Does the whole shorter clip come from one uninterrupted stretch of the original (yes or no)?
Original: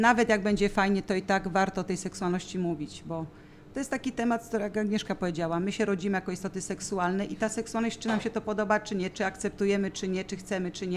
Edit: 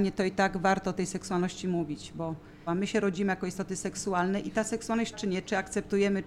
no